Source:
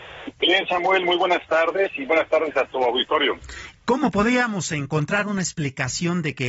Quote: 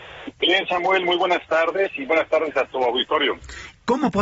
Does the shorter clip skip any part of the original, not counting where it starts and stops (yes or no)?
no